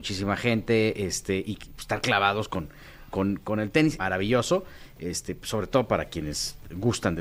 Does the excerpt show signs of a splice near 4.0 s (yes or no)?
yes